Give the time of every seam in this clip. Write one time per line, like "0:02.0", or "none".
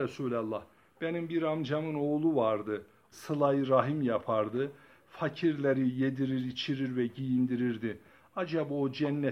0:03.1